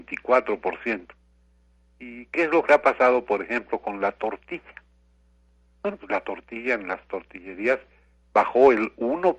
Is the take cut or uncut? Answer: uncut